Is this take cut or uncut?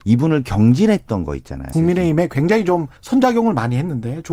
cut